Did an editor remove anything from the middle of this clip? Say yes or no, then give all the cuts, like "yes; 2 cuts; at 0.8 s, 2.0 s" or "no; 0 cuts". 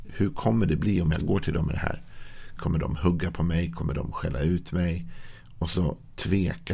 yes; 1 cut; at 2.6 s